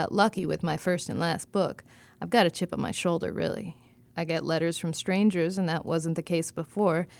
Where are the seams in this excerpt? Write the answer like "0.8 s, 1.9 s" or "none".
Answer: 4.1 s